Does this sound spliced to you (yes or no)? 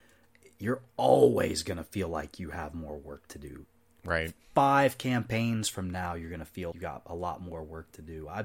yes